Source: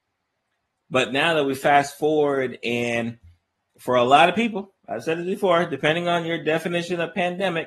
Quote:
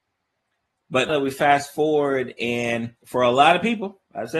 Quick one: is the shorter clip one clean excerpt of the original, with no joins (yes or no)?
no